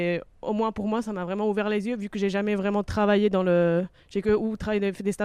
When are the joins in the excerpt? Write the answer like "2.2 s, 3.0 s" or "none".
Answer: none